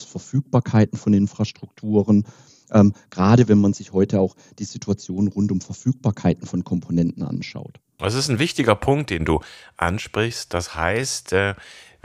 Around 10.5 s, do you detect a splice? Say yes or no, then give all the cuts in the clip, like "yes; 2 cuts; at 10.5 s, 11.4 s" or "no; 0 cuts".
no; 0 cuts